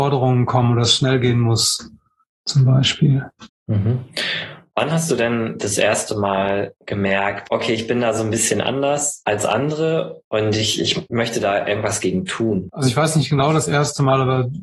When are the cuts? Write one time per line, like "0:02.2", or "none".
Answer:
0:12.7